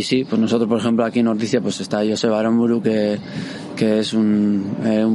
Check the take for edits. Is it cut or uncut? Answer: uncut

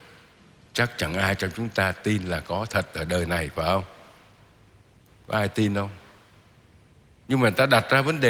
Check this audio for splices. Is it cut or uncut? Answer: cut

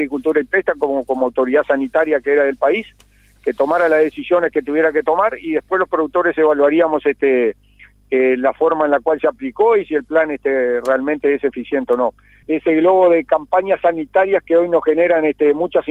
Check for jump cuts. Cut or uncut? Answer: cut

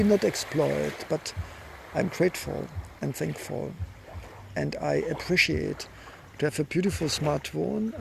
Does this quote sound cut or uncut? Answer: uncut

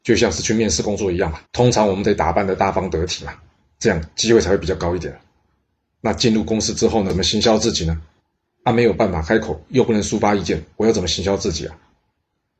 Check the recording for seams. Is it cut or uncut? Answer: cut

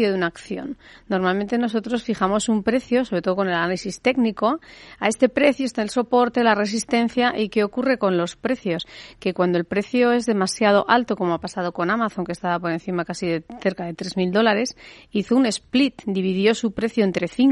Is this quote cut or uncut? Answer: uncut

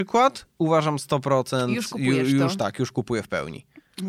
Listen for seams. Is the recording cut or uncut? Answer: uncut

